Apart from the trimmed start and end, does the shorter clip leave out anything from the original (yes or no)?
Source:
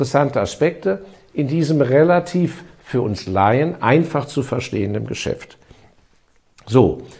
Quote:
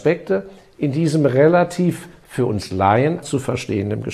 yes